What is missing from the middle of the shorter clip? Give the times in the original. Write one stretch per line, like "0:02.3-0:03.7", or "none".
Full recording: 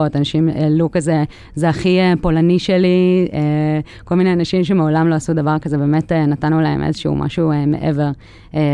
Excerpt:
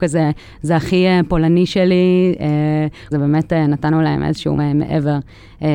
0:04.0-0:05.7
0:07.2-0:07.5